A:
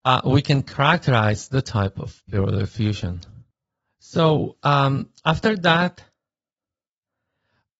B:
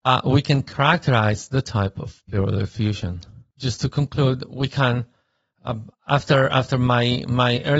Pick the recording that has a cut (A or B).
B